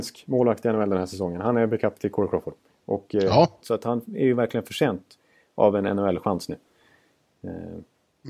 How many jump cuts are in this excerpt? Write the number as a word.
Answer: one